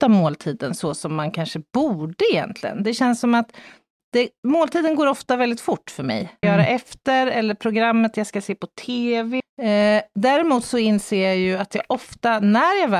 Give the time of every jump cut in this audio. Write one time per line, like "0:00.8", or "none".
0:06.4
0:09.4